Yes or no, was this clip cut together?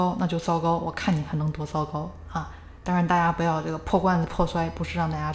no